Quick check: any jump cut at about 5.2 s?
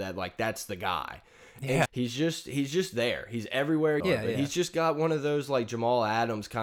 no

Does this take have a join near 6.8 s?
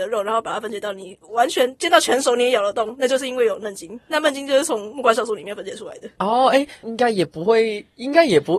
yes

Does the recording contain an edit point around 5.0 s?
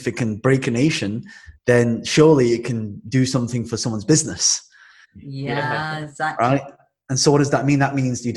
yes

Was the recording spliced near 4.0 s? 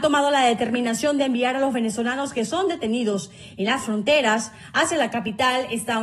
no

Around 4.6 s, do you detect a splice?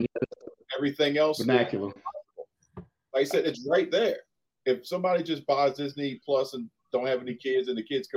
no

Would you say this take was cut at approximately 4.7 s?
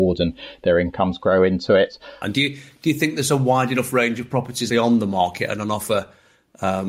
yes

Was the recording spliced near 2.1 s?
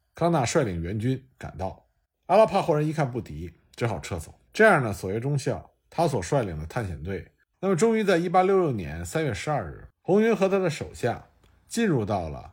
no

